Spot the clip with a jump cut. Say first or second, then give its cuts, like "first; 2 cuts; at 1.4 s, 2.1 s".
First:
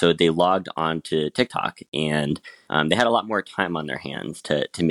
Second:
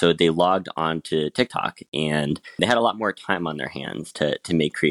second; 1 cut; at 2.6 s